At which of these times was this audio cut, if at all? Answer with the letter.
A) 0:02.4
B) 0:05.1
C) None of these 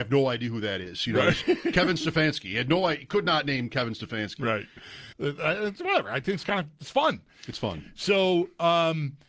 B